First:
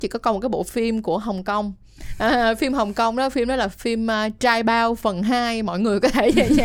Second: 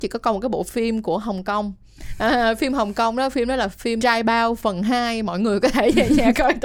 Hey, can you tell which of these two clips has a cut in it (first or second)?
second